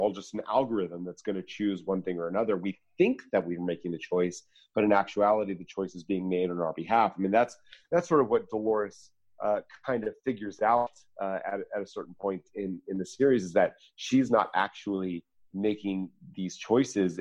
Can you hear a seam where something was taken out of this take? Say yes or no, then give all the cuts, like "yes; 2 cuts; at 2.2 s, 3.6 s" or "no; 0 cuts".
no; 0 cuts